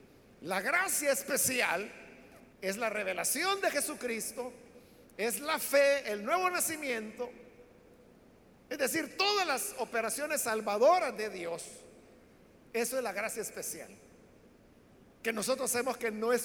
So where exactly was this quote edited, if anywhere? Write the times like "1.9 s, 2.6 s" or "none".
2.5 s